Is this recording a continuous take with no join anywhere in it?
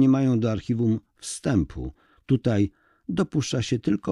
yes; 0 cuts

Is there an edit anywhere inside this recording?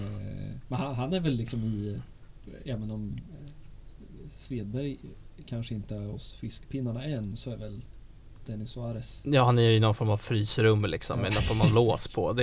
no; 0 cuts

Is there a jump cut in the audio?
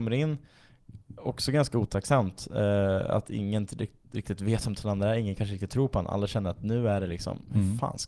no; 0 cuts

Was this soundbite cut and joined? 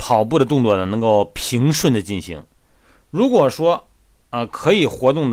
no; 0 cuts

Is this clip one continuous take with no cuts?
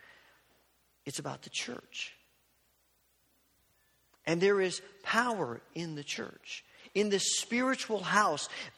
no; 1 cut; at 1.0 s

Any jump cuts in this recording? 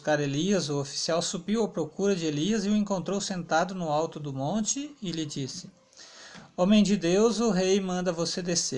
no; 0 cuts

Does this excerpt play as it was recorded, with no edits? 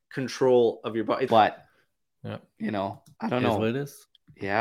no; 2 cuts; at 1.3 s, 3.2 s

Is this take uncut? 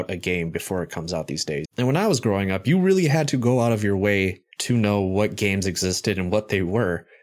no; 2 cuts; at 1.7 s, 4.5 s

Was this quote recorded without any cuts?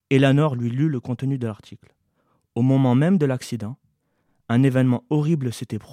yes; 0 cuts

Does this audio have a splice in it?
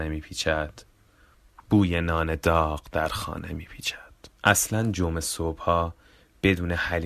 yes; 1 cut; at 4.4 s

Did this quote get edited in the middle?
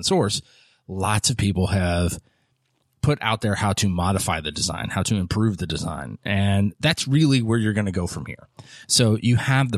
no; 0 cuts

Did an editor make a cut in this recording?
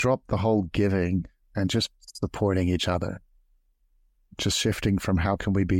no; 0 cuts

